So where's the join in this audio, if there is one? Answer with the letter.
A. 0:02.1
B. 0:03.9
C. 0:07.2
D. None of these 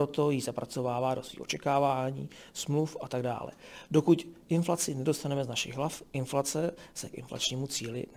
D